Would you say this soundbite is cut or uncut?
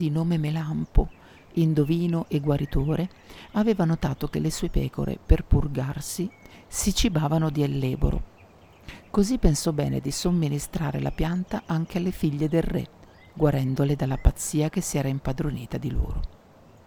uncut